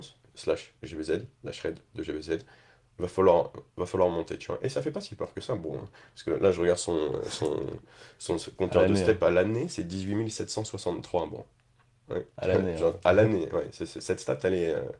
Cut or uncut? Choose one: uncut